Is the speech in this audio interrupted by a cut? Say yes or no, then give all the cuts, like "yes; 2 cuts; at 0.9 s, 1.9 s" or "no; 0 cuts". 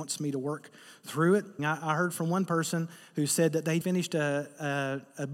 yes; 2 cuts; at 1.6 s, 3.8 s